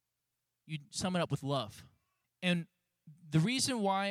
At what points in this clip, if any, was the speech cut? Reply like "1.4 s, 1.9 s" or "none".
2.2 s